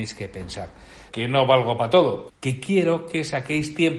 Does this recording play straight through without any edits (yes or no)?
no